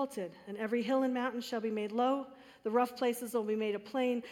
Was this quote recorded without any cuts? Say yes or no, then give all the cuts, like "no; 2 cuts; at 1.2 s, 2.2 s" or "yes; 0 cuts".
yes; 0 cuts